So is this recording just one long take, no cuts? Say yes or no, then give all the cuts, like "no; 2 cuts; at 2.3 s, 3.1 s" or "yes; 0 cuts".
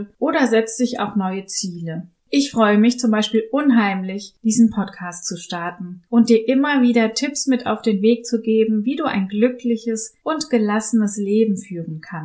yes; 0 cuts